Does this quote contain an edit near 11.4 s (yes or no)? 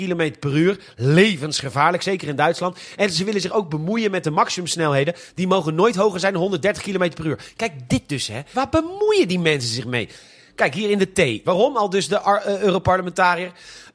yes